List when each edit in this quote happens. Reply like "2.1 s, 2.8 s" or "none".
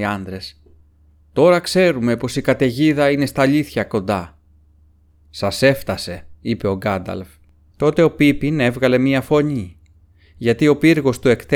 7.7 s

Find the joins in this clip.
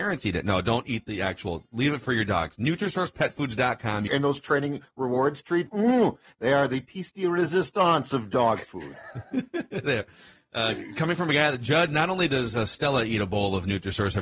4.1 s, 5.7 s

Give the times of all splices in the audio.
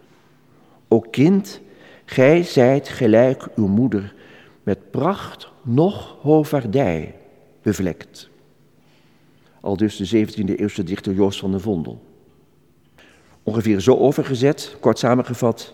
none

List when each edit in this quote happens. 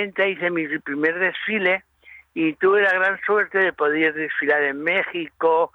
none

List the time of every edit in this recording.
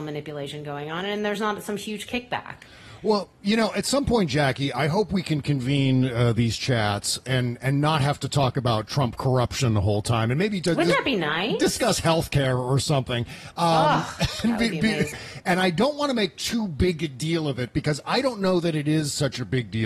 15.1 s

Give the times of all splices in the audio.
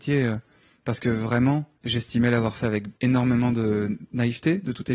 1.8 s, 3.0 s

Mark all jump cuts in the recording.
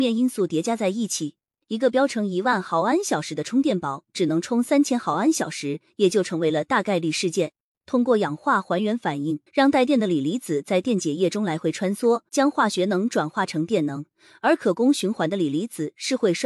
7.8 s, 9.5 s, 12.3 s

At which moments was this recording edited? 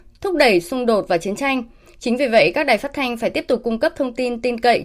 none

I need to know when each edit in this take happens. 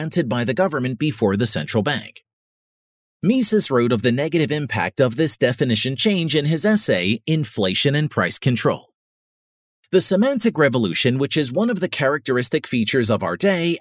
9.8 s

